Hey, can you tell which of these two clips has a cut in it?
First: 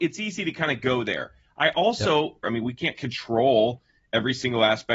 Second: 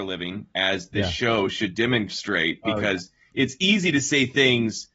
first; 1 cut; at 2.4 s

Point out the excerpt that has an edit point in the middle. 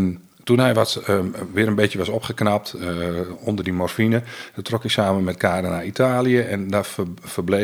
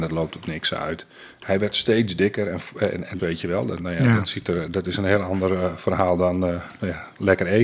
second; 1 cut; at 3.2 s

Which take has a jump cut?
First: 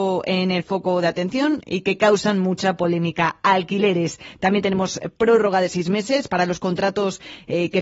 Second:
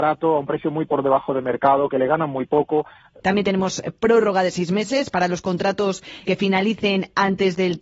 second; 2 cuts; at 3.2 s, 6.2 s

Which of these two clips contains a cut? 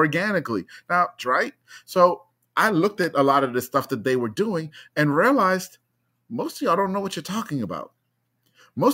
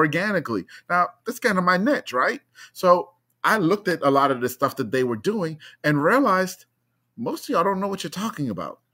first; 1 cut; at 1.2 s

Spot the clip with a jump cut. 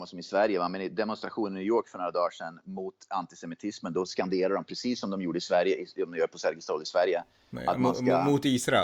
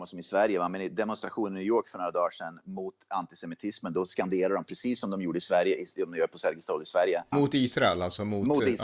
second; 1 cut; at 7.3 s

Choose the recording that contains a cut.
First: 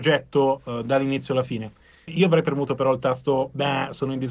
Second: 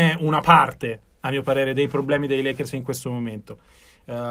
first; 1 cut; at 2.1 s

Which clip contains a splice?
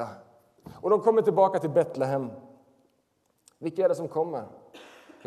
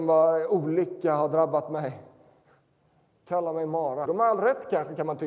second; 1 cut; at 4.1 s

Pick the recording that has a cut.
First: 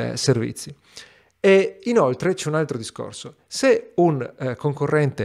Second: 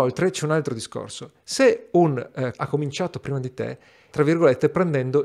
second; 2 cuts; at 2.5 s, 4.1 s

